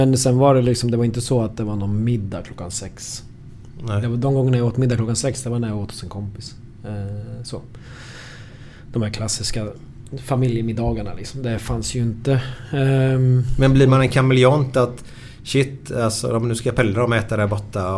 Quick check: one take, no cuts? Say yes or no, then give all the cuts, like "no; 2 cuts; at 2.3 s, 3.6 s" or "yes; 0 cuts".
yes; 0 cuts